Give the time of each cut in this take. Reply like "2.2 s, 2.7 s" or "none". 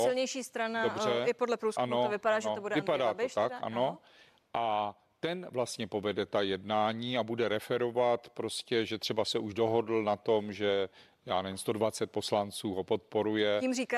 none